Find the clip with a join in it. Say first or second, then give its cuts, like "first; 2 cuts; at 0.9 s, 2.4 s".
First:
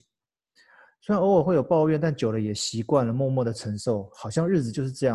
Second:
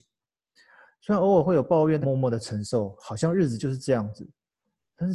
second; 1 cut; at 2.0 s